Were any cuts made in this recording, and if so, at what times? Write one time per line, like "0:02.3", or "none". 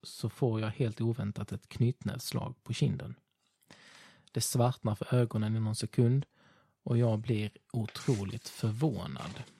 none